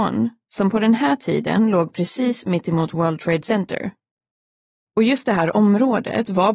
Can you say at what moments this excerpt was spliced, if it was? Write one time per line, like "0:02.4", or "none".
none

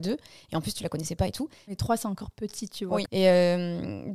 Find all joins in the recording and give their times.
0:01.7
0:03.1

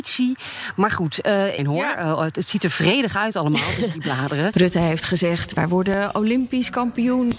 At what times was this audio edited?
0:01.6
0:04.5

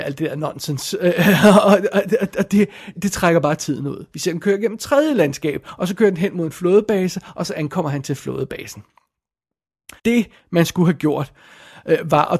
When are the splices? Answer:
0:03.0
0:04.1
0:10.0

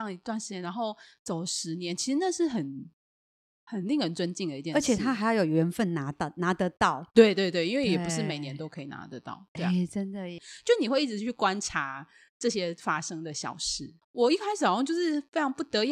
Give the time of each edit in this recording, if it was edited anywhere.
0:10.4
0:14.0

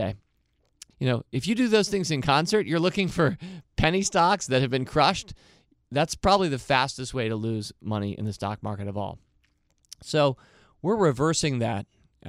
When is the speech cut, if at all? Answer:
0:00.9

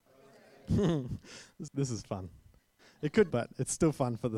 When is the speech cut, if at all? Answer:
0:01.7
0:03.3

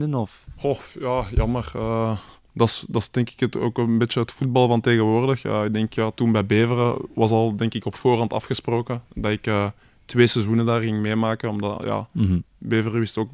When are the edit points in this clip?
none

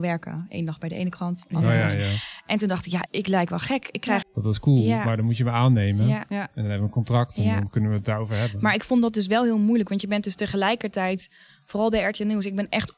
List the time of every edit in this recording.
0:03.1
0:04.2

